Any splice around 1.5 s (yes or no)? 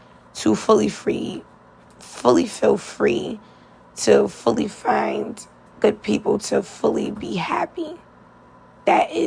no